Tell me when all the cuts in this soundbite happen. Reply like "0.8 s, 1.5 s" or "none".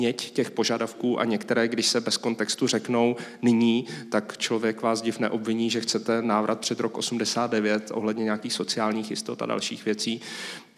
none